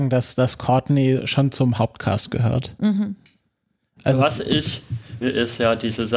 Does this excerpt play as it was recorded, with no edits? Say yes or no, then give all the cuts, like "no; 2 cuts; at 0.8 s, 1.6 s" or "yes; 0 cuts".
no; 1 cut; at 5.2 s